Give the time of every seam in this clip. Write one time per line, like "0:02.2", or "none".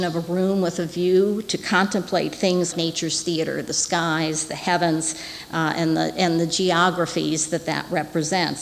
0:02.7